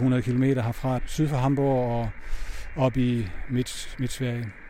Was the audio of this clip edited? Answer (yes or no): yes